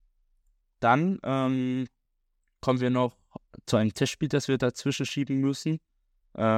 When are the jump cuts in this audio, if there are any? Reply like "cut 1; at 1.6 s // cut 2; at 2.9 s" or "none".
none